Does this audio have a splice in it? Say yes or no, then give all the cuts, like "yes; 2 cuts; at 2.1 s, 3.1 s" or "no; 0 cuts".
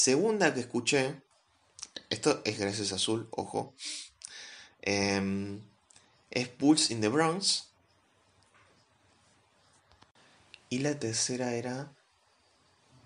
no; 0 cuts